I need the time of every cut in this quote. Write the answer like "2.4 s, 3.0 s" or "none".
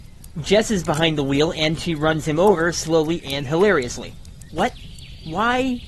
4.5 s